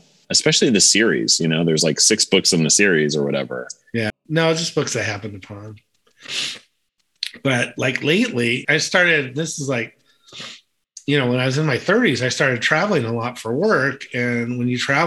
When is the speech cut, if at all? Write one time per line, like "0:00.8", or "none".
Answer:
0:04.1
0:08.6

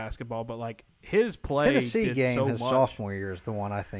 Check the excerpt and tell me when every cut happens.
none

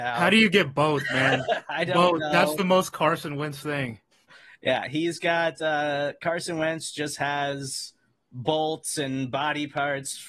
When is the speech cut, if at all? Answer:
none

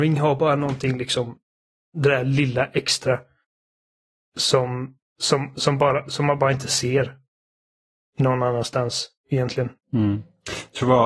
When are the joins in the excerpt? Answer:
0:09.8

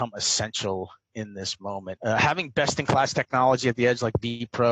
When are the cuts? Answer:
0:02.0

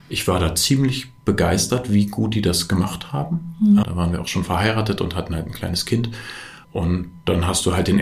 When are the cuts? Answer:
0:03.8
0:06.6

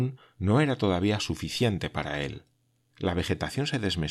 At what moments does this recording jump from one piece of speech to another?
0:02.9

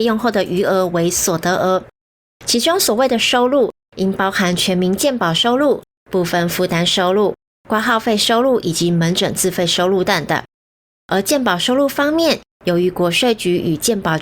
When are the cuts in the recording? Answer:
0:10.1

